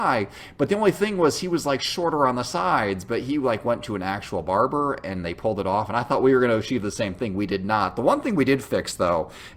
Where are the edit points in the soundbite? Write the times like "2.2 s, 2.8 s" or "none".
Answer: none